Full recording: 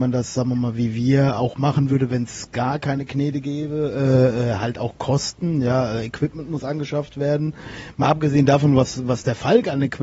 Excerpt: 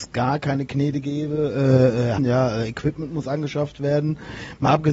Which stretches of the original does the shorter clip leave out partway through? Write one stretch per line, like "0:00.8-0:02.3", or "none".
0:04.6-0:05.5